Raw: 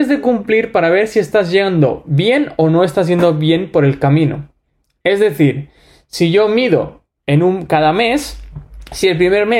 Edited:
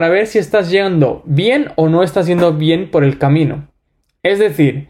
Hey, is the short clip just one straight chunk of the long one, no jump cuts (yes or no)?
yes